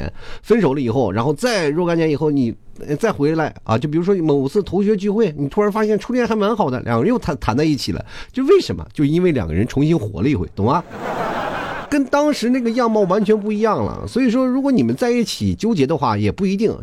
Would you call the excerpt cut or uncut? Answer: cut